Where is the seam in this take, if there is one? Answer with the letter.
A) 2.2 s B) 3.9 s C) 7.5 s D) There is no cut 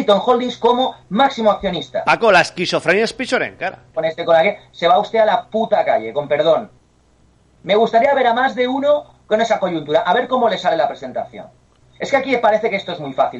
B